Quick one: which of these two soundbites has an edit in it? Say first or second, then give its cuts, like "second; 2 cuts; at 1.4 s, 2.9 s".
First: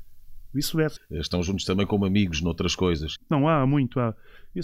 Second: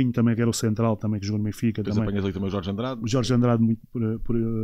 first; 2 cuts; at 1.0 s, 3.2 s